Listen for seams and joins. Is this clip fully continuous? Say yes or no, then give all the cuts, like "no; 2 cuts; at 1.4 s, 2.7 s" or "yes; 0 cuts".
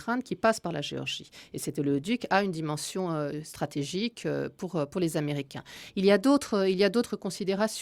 yes; 0 cuts